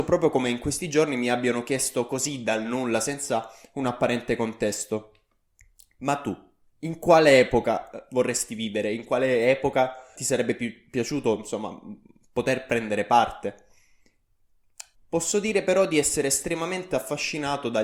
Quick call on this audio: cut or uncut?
cut